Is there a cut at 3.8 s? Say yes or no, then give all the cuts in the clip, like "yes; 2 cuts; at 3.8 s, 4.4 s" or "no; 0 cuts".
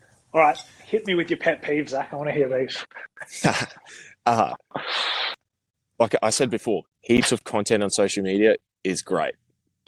no; 1 cut; at 6.9 s